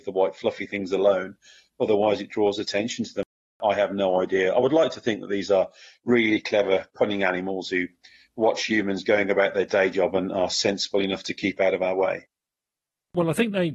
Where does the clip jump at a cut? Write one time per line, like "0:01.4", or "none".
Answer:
none